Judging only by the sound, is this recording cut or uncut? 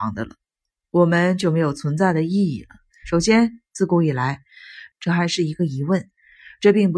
cut